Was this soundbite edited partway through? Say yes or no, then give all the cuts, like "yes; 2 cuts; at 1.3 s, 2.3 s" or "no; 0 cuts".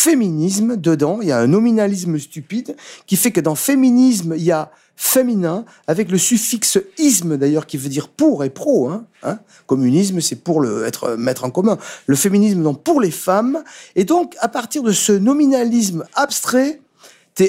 no; 0 cuts